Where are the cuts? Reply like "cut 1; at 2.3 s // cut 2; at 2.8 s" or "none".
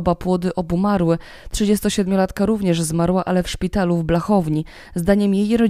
none